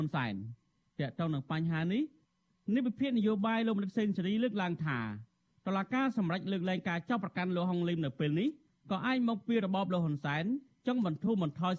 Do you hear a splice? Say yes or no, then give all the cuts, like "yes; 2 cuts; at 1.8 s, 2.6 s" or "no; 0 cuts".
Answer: no; 0 cuts